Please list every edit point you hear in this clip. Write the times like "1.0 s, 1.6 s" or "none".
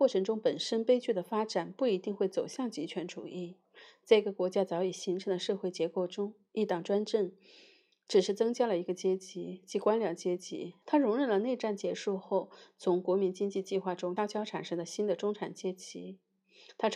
10.8 s, 14.2 s